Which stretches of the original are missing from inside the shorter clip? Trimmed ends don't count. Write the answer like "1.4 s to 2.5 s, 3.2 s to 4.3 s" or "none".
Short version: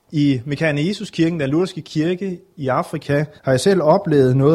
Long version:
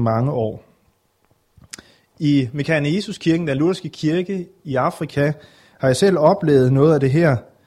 5.4 s to 5.7 s